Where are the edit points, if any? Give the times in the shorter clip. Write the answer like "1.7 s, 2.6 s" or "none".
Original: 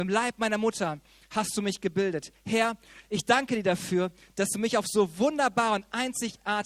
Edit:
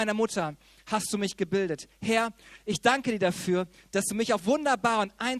4.4 s